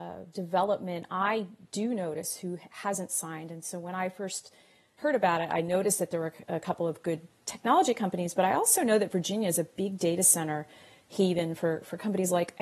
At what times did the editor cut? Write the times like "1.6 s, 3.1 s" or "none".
none